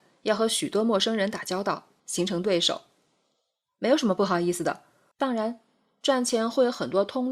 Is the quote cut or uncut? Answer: cut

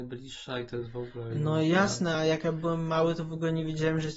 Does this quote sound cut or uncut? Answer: uncut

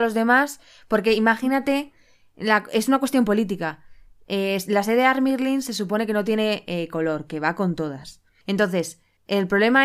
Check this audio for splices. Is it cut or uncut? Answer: uncut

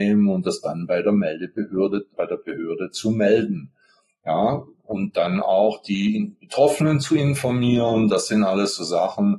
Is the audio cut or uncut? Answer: cut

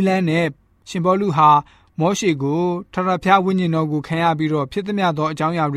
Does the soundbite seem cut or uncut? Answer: uncut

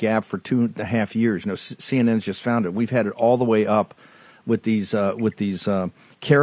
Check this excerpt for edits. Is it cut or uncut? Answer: uncut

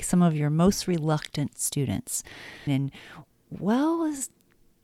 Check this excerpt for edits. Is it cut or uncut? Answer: cut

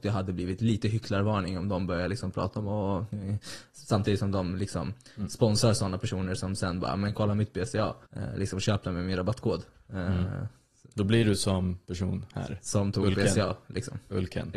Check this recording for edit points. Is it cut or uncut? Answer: cut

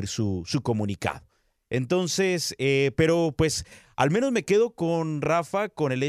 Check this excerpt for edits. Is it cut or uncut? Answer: uncut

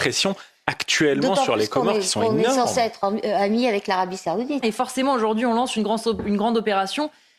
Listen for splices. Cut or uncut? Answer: cut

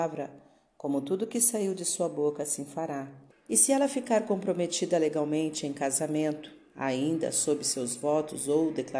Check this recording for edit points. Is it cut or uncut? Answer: cut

